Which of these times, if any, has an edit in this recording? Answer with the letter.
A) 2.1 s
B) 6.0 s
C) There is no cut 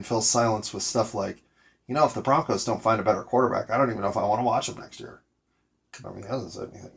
B